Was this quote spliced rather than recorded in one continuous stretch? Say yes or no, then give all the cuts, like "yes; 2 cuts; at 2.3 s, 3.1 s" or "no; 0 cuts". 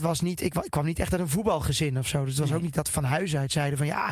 no; 0 cuts